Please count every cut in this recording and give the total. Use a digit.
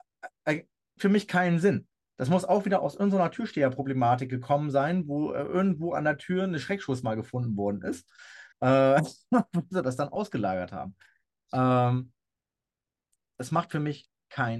2